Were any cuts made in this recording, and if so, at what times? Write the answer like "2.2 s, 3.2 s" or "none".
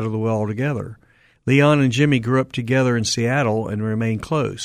none